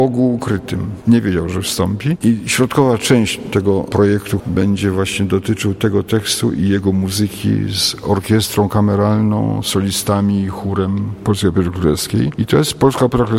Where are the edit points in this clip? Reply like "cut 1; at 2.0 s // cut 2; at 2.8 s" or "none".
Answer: cut 1; at 1.0 s // cut 2; at 2.2 s // cut 3; at 4.4 s